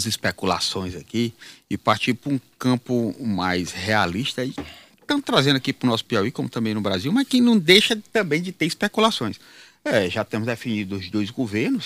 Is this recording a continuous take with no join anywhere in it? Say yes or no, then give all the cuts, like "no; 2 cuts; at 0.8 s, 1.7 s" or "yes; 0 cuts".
yes; 0 cuts